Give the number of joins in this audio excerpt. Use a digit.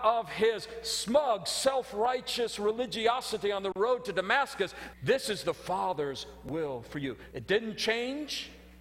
2